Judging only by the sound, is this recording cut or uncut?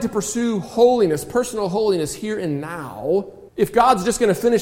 cut